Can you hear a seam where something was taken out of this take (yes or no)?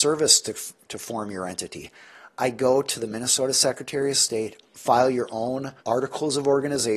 yes